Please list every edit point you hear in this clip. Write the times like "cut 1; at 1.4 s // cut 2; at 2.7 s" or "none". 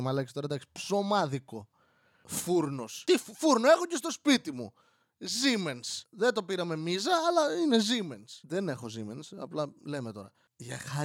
none